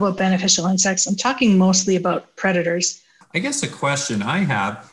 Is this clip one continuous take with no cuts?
no; 1 cut; at 3.2 s

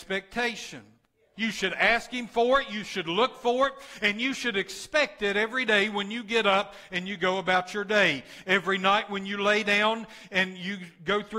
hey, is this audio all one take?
no; 1 cut; at 1.3 s

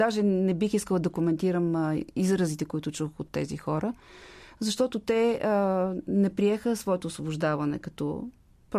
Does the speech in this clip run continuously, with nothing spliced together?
yes; 0 cuts

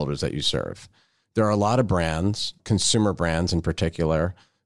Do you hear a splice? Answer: no; 0 cuts

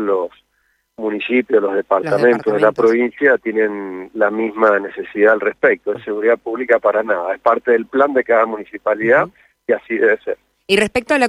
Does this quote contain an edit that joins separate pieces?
yes; 1 cut; at 5.9 s

